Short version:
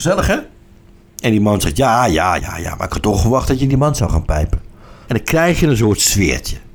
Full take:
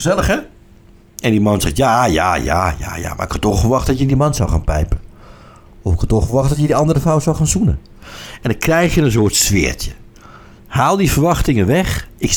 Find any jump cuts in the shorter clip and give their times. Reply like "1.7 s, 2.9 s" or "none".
2.4 s, 5.0 s